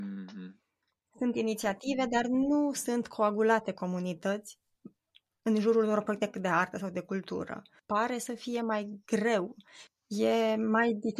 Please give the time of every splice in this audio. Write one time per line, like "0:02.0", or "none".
0:07.8
0:09.9